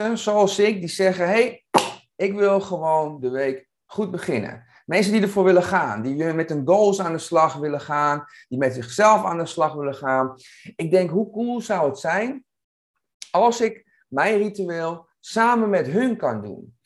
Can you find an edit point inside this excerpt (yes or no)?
no